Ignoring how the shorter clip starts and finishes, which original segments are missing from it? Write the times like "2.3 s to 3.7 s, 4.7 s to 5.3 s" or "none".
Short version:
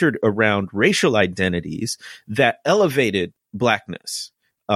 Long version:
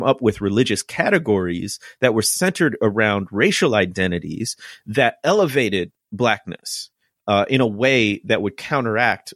none